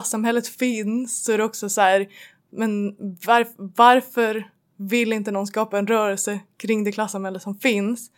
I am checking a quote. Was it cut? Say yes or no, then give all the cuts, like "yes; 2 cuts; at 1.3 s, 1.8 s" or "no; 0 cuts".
no; 0 cuts